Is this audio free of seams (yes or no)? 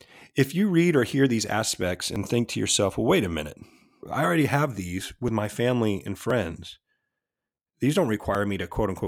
no